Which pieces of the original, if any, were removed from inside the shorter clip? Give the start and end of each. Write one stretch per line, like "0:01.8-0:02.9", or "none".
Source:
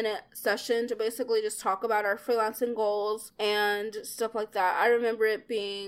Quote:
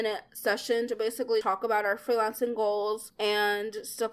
0:01.4-0:01.6